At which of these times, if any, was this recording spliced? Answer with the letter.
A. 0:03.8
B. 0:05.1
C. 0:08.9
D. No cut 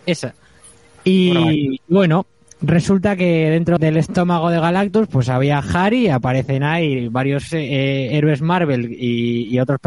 A